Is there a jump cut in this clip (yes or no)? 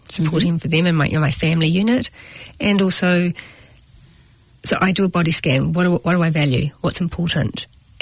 no